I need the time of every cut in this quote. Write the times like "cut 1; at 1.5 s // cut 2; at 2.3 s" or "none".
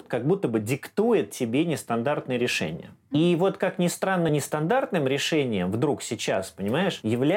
none